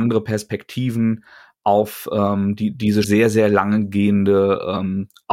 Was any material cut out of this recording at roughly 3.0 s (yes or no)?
yes